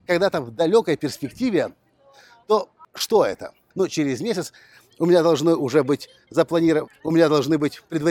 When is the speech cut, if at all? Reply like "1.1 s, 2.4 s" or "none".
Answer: 3.7 s, 6.9 s